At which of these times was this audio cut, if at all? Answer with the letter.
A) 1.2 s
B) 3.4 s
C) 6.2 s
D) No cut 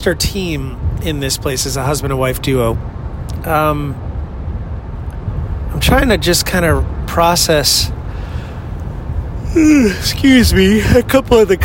B